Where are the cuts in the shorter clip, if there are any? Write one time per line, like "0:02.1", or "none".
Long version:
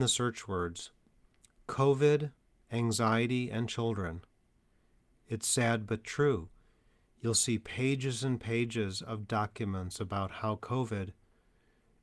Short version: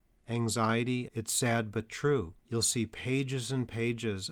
0:01.1
0:02.4